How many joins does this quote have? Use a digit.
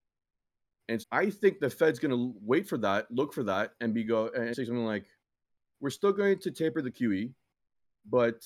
2